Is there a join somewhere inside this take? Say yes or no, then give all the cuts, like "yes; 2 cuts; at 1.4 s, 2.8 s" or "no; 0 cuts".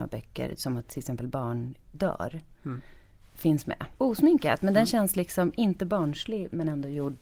yes; 1 cut; at 4.0 s